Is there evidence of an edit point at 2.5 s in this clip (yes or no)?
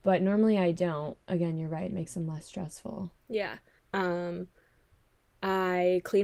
no